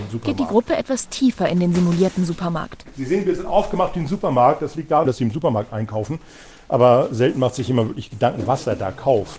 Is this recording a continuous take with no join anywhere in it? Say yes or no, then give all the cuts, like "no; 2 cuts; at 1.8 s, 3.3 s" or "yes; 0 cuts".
no; 1 cut; at 5.0 s